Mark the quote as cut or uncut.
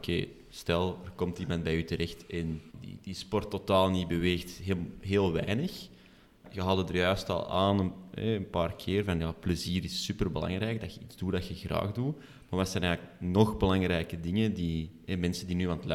cut